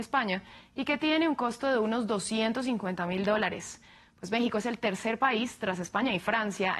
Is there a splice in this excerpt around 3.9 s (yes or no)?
no